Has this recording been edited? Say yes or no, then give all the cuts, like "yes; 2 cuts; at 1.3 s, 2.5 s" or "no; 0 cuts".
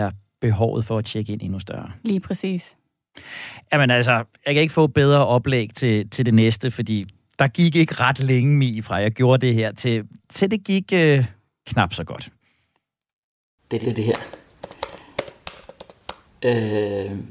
yes; 2 cuts; at 13.8 s, 16.3 s